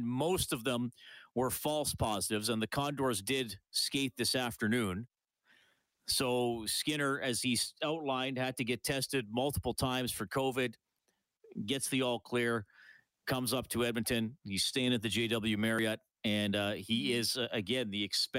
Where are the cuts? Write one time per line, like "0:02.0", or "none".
none